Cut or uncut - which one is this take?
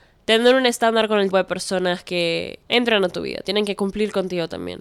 cut